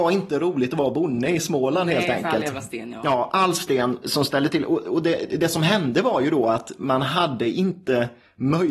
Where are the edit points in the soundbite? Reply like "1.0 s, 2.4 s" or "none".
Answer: 4.0 s